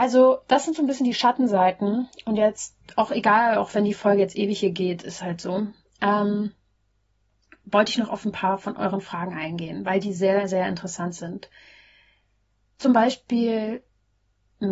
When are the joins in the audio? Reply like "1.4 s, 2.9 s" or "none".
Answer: none